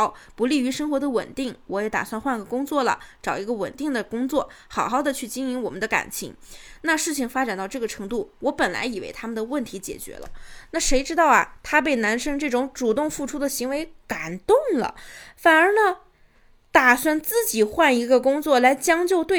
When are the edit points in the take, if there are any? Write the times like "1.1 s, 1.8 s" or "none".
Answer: none